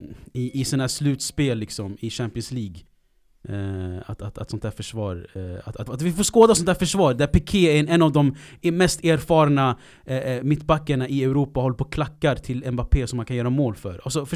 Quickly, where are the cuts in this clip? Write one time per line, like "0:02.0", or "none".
0:05.9